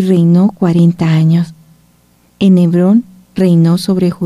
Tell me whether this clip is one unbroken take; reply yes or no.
yes